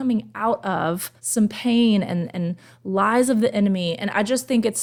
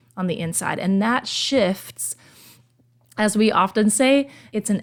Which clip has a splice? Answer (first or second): first